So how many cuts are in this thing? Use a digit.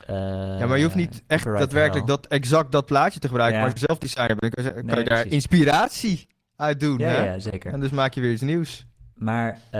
0